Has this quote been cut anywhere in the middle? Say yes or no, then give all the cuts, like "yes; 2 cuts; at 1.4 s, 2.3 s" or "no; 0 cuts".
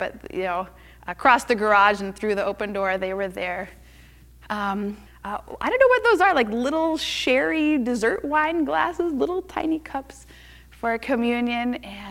yes; 1 cut; at 5.1 s